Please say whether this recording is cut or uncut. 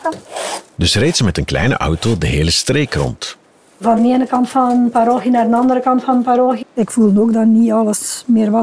cut